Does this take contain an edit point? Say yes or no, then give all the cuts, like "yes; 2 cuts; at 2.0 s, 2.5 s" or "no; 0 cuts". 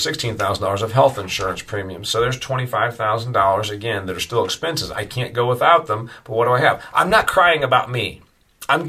no; 0 cuts